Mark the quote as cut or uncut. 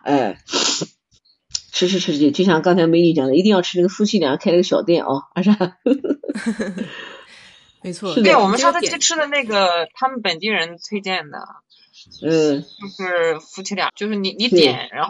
cut